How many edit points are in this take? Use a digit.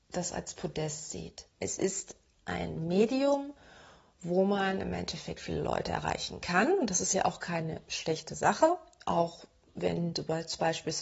1